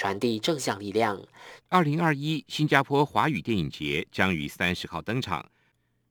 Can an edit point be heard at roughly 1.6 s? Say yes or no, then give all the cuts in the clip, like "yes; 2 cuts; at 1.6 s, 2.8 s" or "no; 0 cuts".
yes; 1 cut; at 1.6 s